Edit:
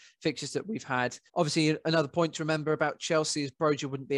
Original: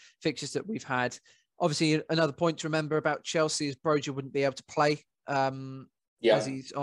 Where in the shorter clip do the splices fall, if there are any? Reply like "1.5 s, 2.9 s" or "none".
1.3 s